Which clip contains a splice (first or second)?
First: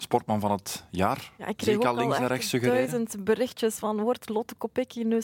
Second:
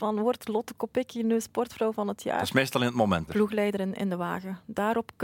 second